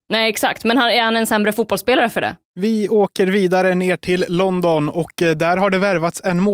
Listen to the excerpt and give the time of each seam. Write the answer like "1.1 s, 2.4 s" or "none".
2.4 s